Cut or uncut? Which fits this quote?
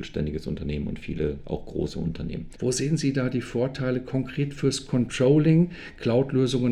cut